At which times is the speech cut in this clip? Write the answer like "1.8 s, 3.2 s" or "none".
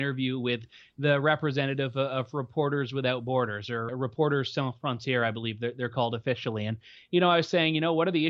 3.9 s